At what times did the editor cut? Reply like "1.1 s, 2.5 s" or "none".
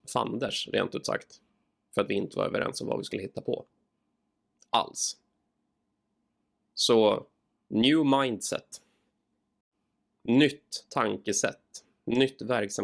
none